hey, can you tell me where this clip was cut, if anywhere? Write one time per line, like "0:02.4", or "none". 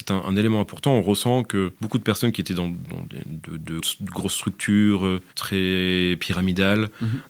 0:01.8
0:03.8

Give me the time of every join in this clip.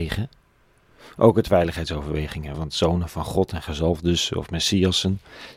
0:02.5

